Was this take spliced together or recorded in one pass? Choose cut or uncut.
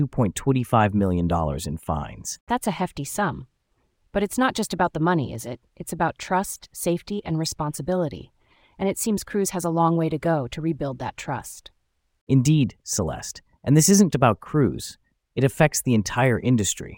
cut